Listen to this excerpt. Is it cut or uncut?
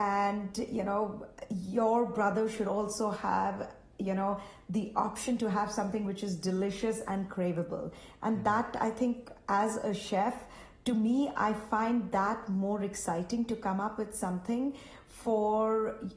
uncut